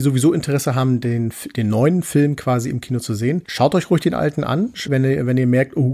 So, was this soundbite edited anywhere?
yes; 1 cut; at 4.9 s

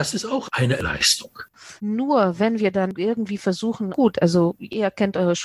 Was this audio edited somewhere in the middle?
yes; 2 cuts; at 1.8 s, 3.9 s

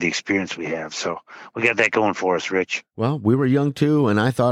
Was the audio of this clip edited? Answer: no; 0 cuts

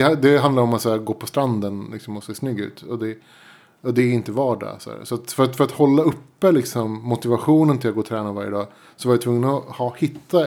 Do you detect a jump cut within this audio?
no; 0 cuts

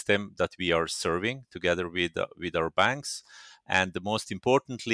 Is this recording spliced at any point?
no; 0 cuts

